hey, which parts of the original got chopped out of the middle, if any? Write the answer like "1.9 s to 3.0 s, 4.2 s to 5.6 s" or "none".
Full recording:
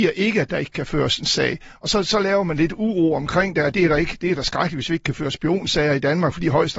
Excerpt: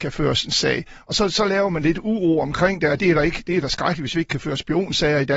none